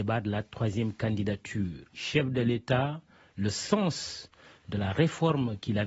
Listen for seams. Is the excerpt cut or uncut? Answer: cut